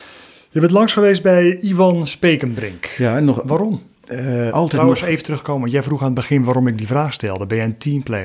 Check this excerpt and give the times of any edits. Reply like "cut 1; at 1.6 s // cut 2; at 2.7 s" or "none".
cut 1; at 4.5 s

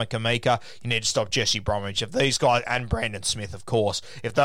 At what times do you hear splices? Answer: none

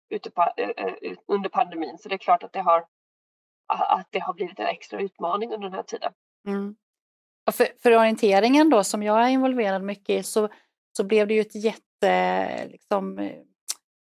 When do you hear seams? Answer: cut 1; at 6.3 s // cut 2; at 10.2 s

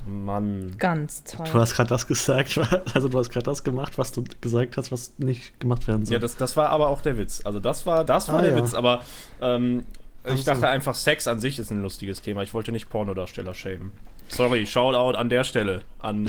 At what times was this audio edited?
cut 1; at 8.1 s

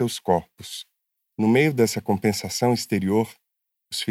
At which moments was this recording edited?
none

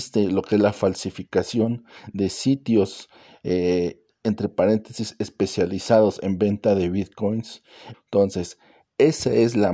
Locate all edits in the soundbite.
cut 1; at 7.9 s

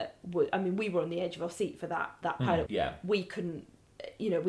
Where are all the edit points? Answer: cut 1; at 2.7 s

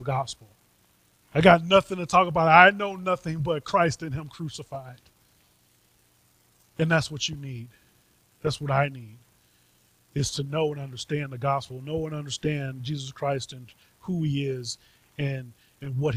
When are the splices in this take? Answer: cut 1; at 1.2 s

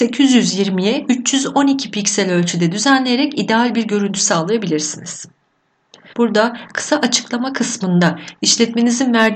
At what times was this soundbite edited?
cut 1; at 6.1 s

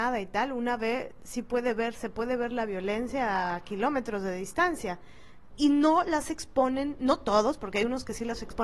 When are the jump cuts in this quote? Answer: cut 1; at 5.5 s

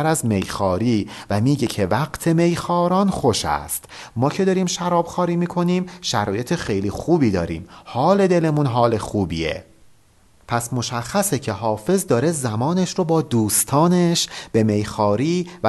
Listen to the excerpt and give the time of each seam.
none

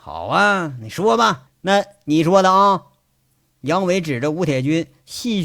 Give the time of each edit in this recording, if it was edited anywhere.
cut 1; at 1.5 s

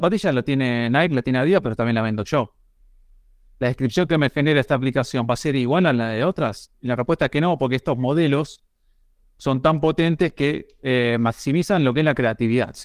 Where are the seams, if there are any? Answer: none

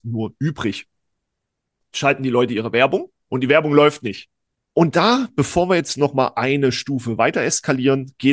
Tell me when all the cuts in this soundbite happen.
cut 1; at 3.2 s // cut 2; at 4.6 s

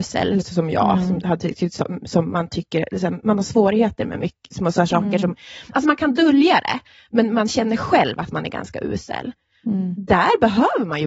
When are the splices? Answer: none

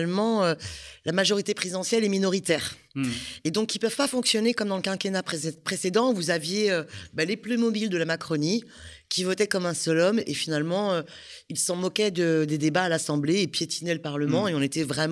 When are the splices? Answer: none

